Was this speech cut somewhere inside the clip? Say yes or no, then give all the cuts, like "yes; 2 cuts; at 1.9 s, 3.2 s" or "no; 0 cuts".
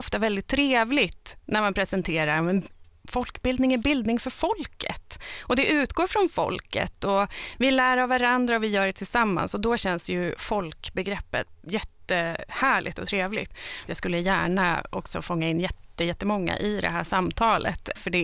yes; 1 cut; at 13.9 s